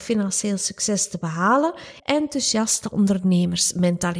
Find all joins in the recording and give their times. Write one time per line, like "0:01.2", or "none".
0:02.0